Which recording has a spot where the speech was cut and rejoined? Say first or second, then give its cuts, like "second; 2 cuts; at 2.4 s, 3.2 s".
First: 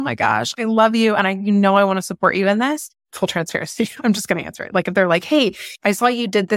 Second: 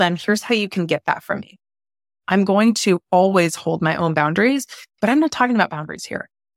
first; 1 cut; at 2.9 s